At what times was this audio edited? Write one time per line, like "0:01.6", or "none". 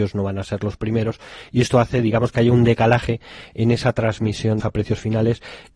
0:04.6

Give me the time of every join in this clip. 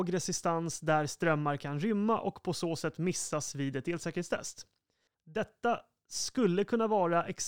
none

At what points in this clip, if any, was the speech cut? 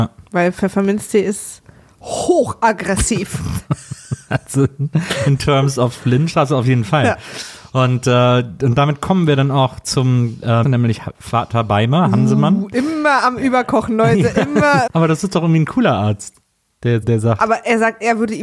0:10.6
0:14.9
0:17.0

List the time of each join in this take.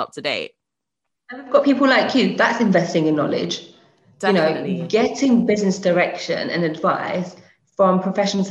none

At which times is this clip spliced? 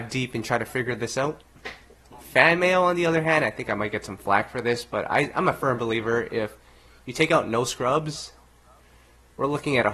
0:02.1

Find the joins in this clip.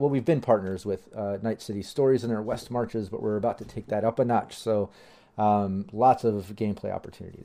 none

